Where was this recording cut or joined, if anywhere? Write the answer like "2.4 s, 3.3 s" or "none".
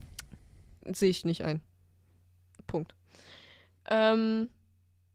none

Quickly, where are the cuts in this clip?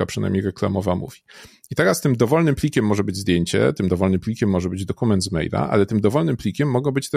none

